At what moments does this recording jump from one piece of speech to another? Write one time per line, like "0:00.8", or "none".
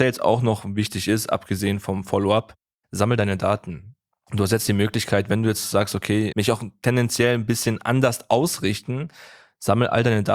0:06.3